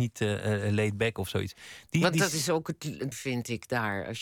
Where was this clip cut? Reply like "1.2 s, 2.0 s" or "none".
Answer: 3.1 s

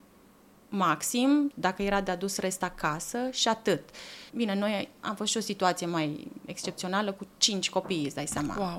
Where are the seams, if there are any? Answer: 1.5 s, 4.3 s

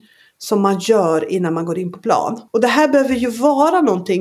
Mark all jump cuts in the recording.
2.5 s

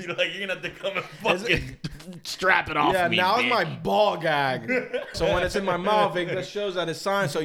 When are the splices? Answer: 5.1 s

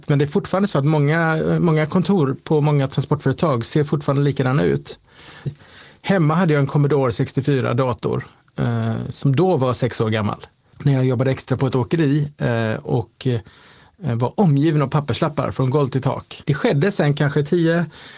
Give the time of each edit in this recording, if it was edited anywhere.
5.5 s, 10.7 s, 16.4 s

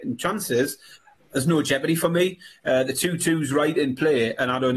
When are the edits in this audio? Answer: none

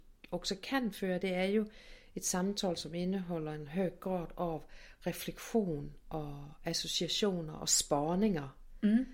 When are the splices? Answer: none

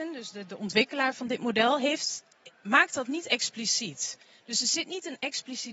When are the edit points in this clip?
none

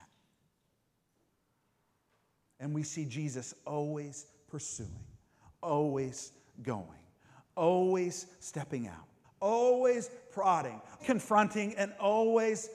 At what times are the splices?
9.2 s, 11.0 s

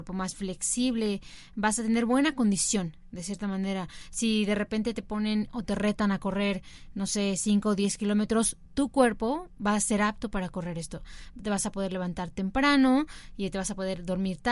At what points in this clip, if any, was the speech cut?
none

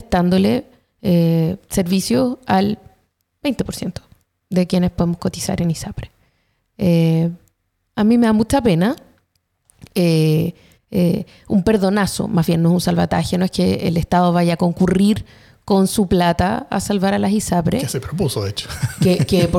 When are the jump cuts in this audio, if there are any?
10.7 s

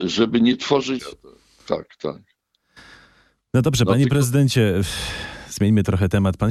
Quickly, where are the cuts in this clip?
1.0 s

